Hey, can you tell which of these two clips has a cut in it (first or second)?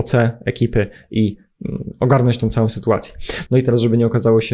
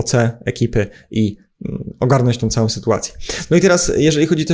first